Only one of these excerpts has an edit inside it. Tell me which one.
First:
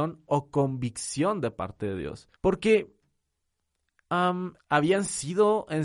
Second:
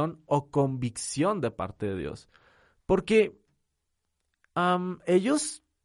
first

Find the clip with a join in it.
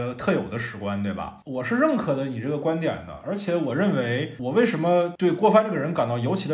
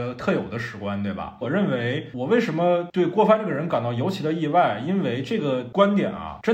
second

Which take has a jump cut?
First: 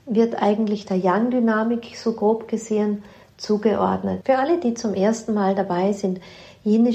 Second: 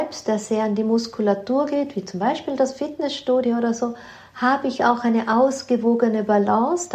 first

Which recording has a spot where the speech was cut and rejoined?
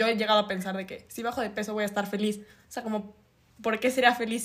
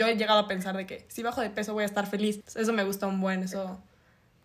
second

